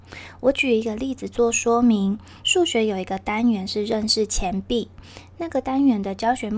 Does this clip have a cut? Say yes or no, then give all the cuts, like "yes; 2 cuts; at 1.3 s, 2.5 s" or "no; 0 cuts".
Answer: yes; 1 cut; at 2.4 s